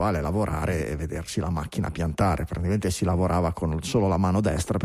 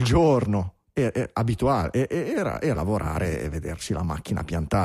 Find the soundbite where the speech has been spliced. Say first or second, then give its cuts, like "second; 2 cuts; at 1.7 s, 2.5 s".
second; 1 cut; at 2.8 s